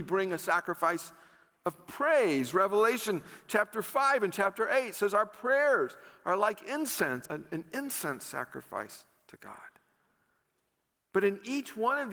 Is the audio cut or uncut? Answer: cut